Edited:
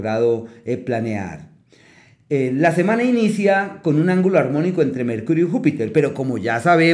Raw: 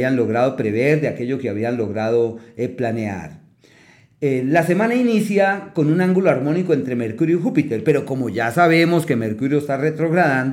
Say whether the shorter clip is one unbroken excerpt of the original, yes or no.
yes